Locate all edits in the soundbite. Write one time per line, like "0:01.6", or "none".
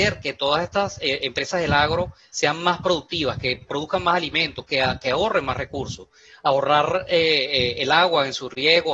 none